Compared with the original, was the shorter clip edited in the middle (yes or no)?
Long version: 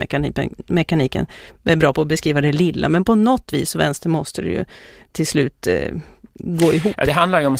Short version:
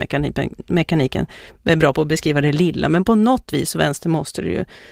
no